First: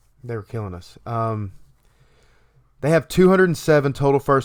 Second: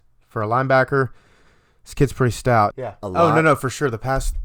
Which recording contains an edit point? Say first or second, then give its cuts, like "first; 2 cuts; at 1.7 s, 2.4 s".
second; 1 cut; at 2.7 s